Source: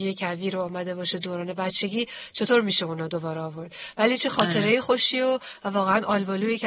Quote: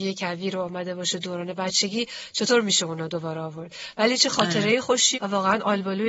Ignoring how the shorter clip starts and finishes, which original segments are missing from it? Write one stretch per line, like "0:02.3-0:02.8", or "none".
0:05.1-0:05.6